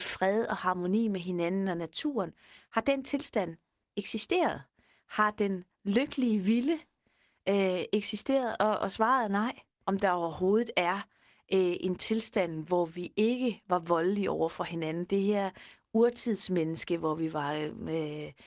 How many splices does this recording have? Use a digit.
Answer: 1